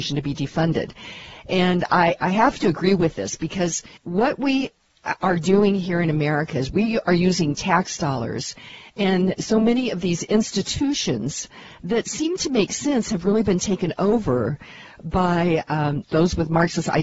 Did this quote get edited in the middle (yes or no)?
yes